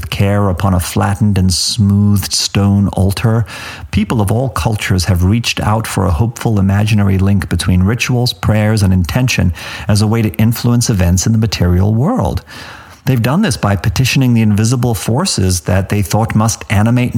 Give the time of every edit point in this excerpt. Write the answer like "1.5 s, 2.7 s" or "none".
13.0 s

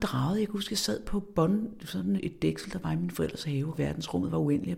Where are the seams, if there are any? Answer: 2.2 s, 3.7 s

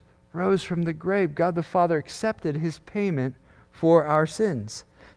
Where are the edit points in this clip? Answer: none

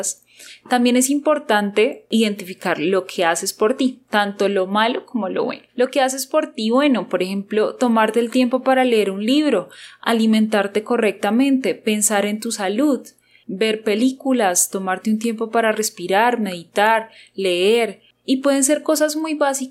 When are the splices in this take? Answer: 5.7 s

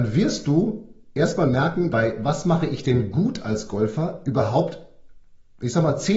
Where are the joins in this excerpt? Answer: 1.9 s

